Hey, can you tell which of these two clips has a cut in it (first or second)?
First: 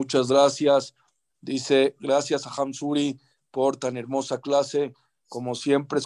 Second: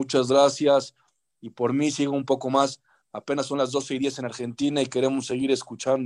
first